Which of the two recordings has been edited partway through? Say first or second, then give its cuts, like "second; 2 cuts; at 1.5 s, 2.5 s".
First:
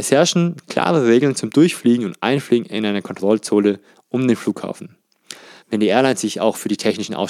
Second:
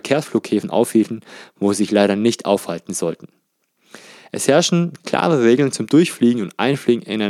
first; 1 cut; at 5.6 s